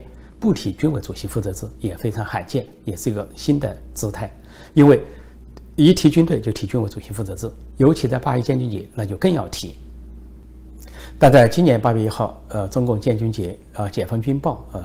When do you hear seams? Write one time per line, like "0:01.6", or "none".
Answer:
none